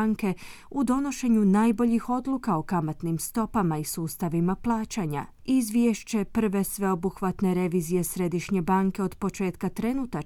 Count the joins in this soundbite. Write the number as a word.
zero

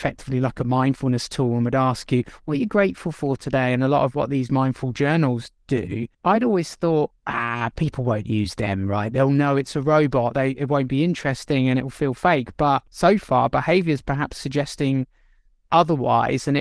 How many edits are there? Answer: two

